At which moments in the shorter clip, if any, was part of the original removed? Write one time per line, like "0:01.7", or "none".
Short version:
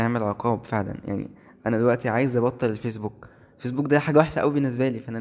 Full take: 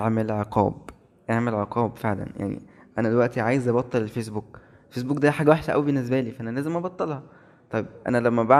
none